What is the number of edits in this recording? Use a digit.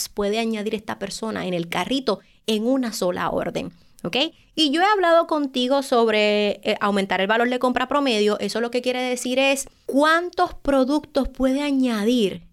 1